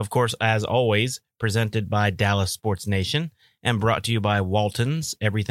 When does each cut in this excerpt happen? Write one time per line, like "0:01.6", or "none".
none